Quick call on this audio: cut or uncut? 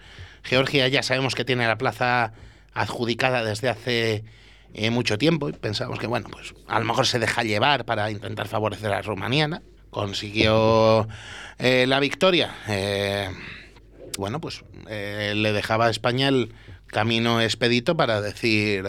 cut